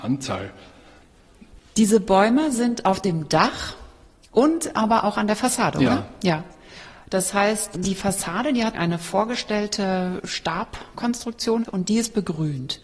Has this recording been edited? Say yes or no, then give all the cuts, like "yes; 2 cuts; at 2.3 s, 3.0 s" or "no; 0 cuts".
no; 0 cuts